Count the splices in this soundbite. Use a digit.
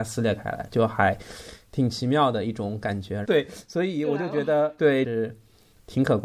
2